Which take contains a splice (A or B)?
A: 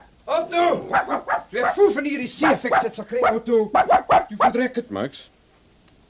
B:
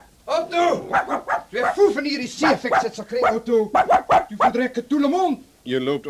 A